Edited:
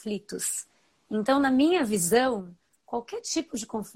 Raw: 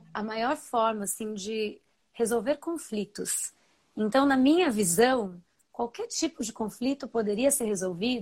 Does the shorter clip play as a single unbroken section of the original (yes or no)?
yes